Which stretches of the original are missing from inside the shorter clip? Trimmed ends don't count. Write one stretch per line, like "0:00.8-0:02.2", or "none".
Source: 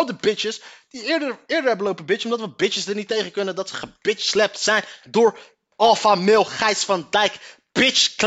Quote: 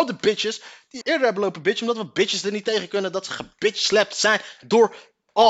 0:01.0-0:01.4